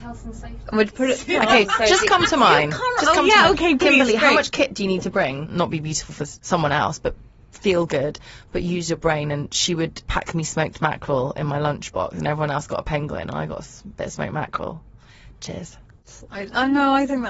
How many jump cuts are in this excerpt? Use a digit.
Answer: 1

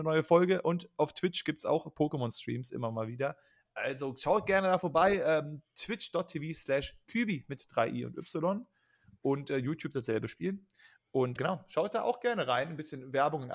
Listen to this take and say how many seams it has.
1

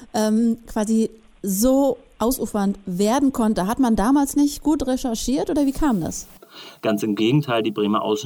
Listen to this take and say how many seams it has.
1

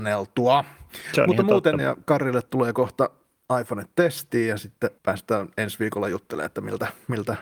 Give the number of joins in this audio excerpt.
2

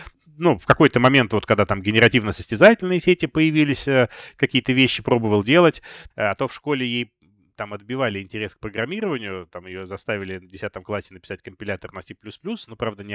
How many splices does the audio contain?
1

